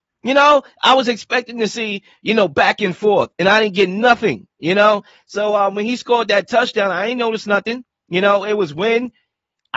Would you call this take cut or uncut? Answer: uncut